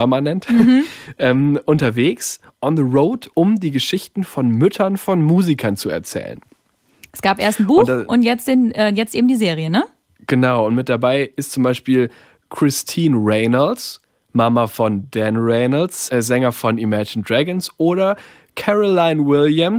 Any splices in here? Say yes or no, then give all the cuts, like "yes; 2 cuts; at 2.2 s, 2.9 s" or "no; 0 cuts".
no; 0 cuts